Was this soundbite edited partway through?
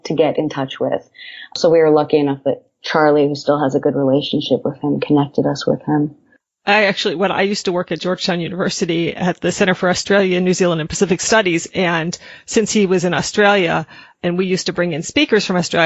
no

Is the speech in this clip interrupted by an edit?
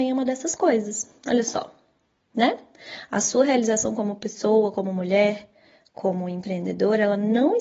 no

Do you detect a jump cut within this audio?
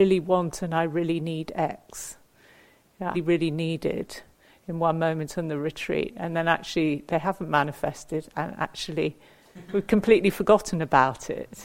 yes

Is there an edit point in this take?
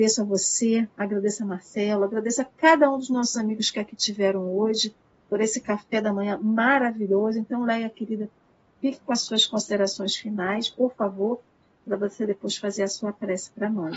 no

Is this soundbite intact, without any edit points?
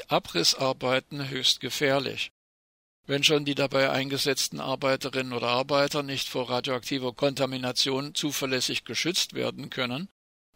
yes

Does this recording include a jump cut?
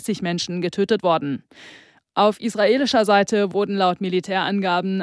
no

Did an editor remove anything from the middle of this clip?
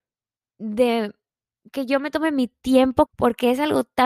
yes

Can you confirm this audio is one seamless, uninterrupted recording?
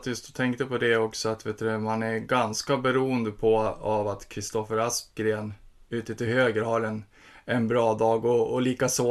yes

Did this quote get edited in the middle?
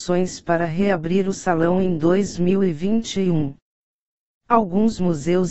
no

